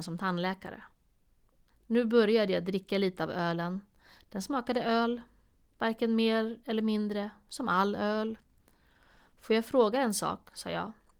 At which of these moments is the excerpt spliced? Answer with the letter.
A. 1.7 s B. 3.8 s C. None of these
A